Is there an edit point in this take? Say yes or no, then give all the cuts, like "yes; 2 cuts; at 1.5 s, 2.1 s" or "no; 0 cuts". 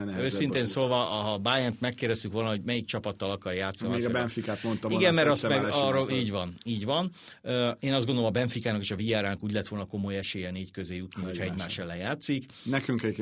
no; 0 cuts